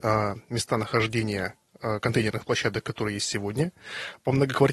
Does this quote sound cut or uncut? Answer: uncut